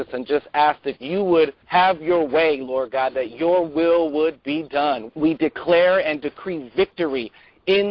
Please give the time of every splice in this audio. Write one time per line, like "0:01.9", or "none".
0:01.6
0:05.1